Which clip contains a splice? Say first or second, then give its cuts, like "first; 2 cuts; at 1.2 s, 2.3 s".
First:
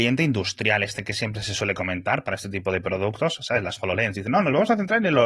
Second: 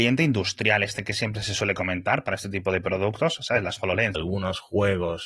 second; 1 cut; at 4.1 s